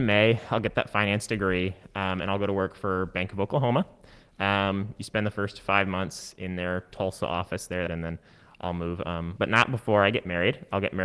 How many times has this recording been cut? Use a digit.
2